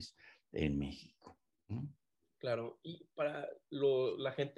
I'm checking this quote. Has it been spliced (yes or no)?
no